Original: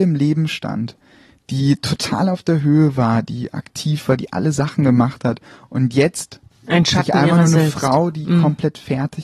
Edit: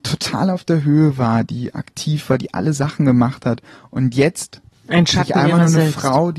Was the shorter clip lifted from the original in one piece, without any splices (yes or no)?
yes